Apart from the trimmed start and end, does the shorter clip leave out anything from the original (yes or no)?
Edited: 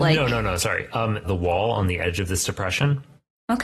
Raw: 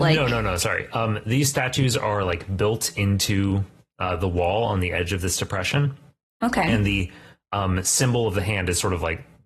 yes